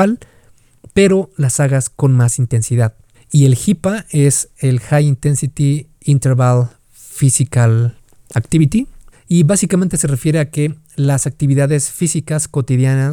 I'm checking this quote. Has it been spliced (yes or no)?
yes